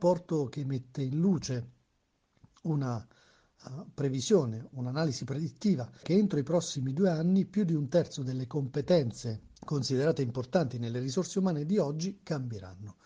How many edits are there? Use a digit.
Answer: 3